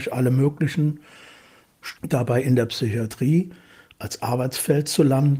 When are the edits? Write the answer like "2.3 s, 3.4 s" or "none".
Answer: 2.0 s